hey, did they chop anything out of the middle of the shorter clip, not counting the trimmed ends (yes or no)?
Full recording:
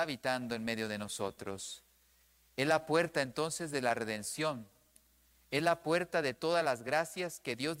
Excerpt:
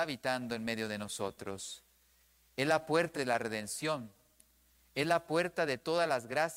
yes